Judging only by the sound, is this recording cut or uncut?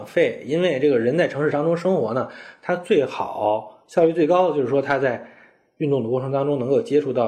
uncut